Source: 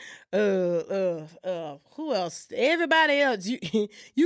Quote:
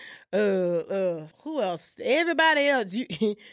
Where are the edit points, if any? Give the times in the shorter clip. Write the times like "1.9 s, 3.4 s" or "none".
1.3 s